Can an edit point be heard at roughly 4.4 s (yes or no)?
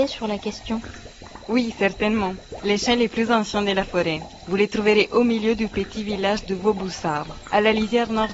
no